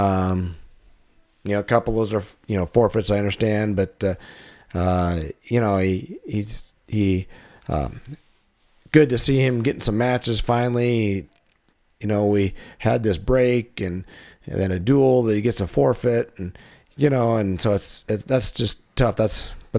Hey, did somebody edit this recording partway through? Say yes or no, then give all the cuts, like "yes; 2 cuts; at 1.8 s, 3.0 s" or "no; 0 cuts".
no; 0 cuts